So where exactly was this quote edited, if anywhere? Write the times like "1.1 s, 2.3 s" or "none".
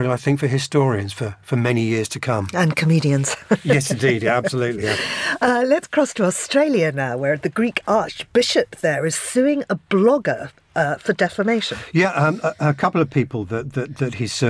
none